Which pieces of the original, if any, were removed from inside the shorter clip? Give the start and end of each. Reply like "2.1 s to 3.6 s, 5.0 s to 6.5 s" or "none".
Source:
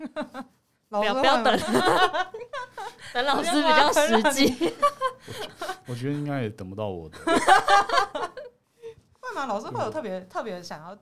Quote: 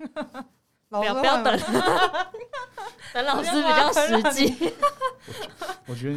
none